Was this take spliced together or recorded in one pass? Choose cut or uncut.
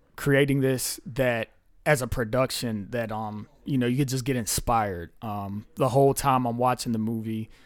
uncut